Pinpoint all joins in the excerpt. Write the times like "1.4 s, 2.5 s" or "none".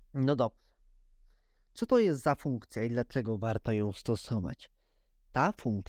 none